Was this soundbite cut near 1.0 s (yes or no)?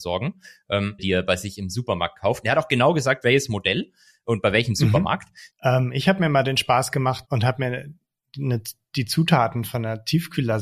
yes